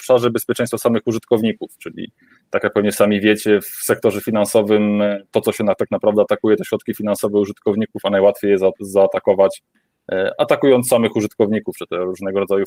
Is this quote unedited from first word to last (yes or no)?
yes